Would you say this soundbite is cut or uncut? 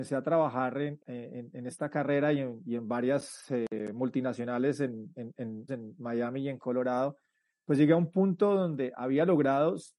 cut